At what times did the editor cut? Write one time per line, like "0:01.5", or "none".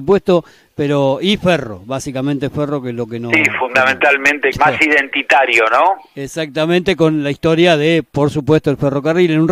0:04.5

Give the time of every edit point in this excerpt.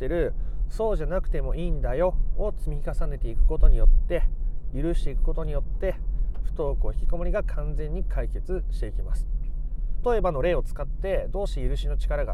0:10.0

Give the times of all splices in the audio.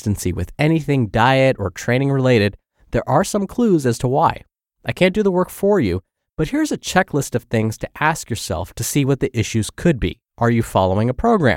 0:10.3

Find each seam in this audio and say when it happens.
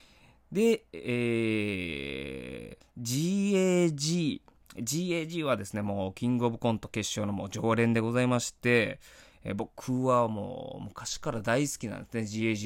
0:02.8

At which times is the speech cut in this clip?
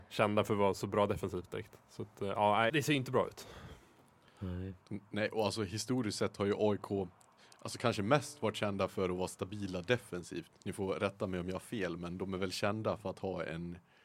0:02.7

